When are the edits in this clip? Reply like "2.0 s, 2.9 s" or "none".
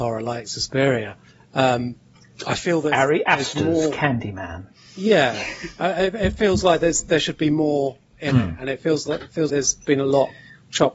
9.5 s